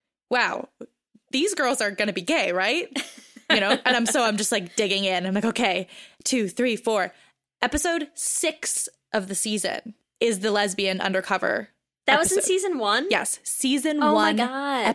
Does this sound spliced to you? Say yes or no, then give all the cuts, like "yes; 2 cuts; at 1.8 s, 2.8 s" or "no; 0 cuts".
no; 0 cuts